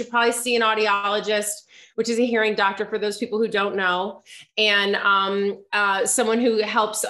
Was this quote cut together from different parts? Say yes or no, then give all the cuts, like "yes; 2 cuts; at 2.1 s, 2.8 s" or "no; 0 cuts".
no; 0 cuts